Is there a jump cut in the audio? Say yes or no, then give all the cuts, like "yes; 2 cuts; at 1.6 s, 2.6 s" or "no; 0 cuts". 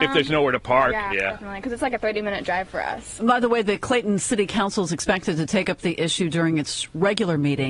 yes; 2 cuts; at 1.1 s, 3.2 s